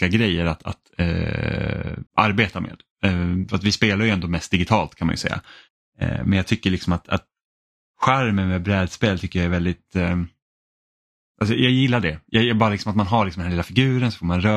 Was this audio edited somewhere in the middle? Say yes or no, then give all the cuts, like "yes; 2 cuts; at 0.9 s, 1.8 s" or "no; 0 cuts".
yes; 1 cut; at 2.1 s